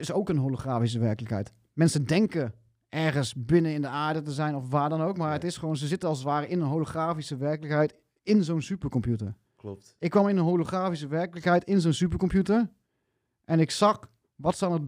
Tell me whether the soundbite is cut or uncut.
uncut